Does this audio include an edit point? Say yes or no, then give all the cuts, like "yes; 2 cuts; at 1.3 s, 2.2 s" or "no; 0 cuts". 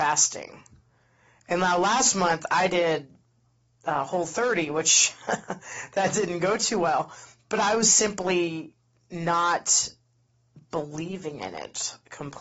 no; 0 cuts